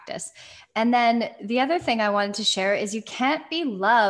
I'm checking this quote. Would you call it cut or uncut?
uncut